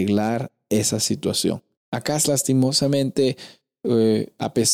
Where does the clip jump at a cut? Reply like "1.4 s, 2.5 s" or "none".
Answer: 1.7 s

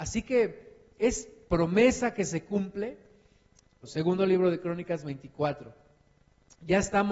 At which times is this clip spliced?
1.5 s, 3.8 s

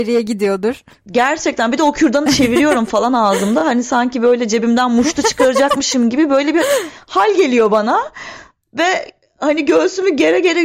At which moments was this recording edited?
none

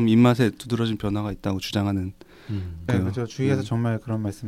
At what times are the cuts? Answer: 2.9 s

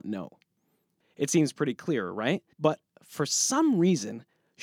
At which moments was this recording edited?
1.0 s, 2.5 s

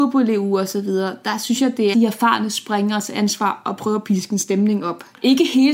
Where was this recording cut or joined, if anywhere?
1.9 s

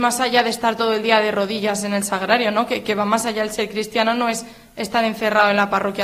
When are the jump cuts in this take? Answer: none

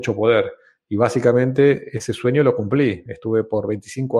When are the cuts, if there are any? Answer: none

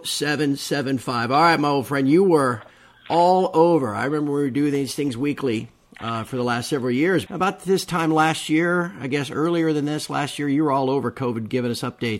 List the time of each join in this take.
7.3 s

